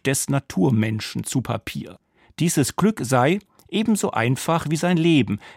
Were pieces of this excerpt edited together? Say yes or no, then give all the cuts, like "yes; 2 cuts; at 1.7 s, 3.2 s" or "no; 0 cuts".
no; 0 cuts